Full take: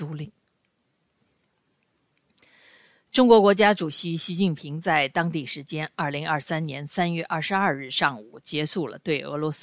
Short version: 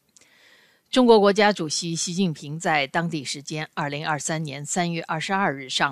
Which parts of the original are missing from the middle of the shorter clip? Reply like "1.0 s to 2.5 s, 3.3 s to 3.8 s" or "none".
none